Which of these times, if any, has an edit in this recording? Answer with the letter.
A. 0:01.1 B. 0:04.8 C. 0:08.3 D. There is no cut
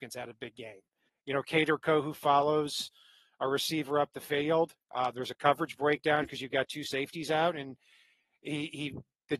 A